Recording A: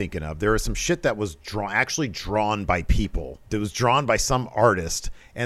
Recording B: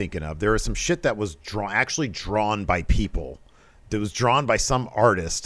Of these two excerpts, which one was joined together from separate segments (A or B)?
A